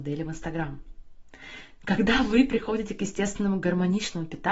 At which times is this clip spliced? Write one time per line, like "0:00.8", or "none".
none